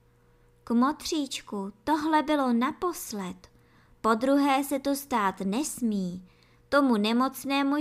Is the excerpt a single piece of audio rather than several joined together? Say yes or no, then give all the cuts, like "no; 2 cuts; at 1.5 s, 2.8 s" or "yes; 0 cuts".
no; 1 cut; at 6.5 s